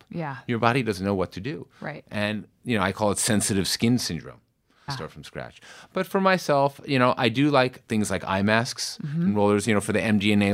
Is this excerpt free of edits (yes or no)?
no